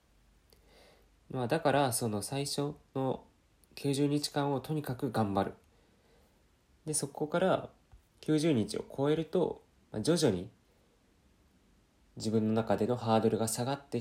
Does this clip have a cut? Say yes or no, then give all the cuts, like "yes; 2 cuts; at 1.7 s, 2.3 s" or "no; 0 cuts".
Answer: no; 0 cuts